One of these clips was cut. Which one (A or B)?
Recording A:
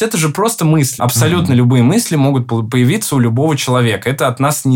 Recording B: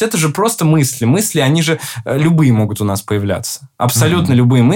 A